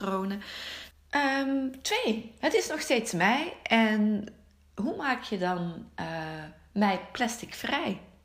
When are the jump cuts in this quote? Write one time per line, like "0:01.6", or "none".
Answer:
0:00.9